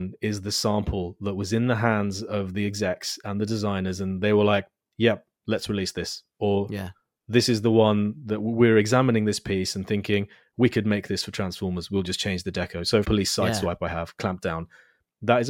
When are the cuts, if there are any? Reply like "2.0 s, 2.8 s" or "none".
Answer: 13.0 s

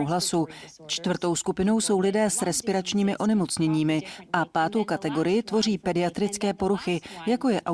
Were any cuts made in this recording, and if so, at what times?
none

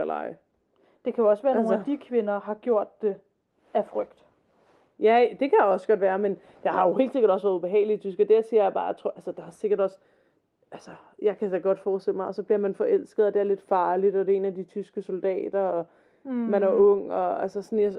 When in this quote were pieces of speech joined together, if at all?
none

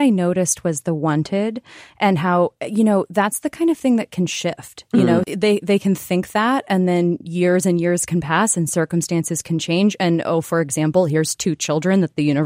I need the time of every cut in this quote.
5.2 s

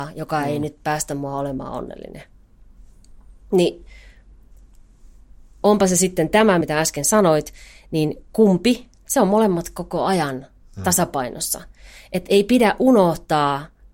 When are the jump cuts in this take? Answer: 6.6 s

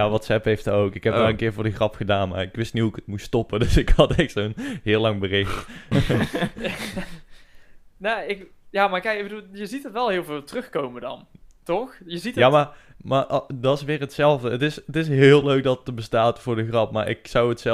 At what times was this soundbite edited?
5.9 s

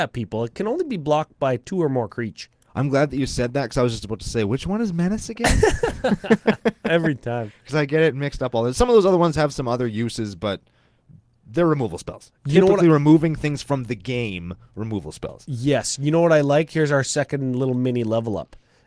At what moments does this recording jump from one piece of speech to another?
none

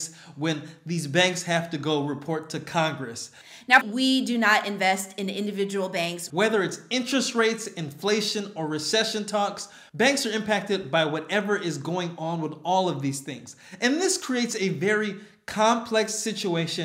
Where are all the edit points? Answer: 3.8 s, 6.3 s

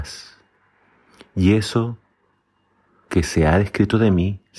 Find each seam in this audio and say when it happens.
none

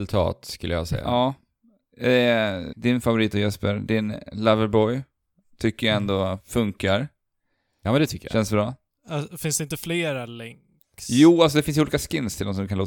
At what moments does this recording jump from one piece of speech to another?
2.7 s

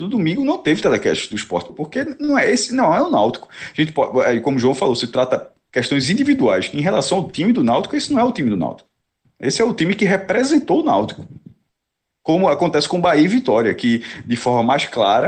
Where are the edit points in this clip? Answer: 1.7 s

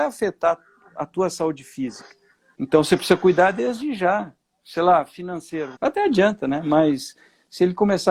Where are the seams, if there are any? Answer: 2.5 s, 5.8 s

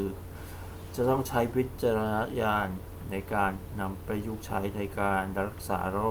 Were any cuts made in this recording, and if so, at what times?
4.0 s

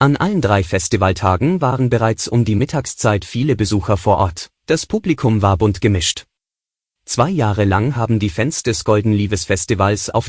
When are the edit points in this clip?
4.6 s, 6.9 s

